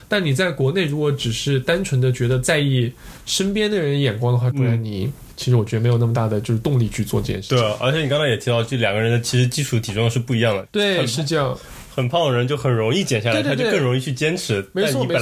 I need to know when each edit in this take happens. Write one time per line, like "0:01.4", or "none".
0:04.5